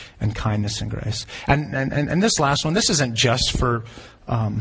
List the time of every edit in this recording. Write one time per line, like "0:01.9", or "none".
none